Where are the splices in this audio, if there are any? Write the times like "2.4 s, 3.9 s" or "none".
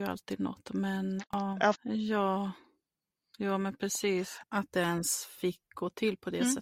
1.7 s, 4.4 s